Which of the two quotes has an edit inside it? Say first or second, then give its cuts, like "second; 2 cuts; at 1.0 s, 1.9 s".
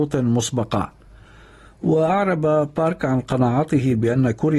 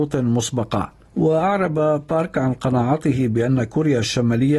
second; 1 cut; at 1.1 s